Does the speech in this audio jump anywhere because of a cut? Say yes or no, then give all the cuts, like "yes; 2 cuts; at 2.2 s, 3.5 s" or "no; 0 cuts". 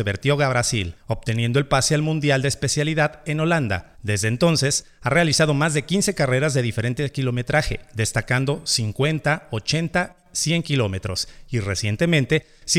no; 0 cuts